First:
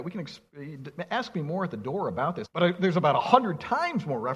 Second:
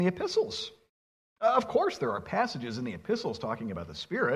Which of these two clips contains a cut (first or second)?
first